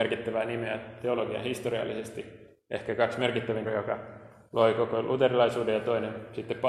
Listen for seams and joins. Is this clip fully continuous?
no; 1 cut; at 3.7 s

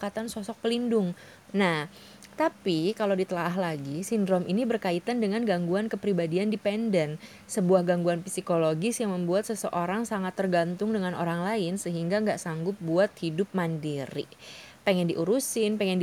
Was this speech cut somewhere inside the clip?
yes; 1 cut; at 1.5 s

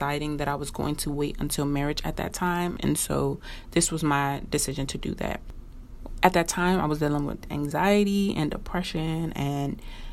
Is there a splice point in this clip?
yes; 1 cut; at 2.8 s

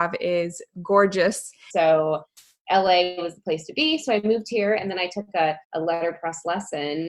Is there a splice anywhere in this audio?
yes; 2 cuts; at 1.7 s, 5.6 s

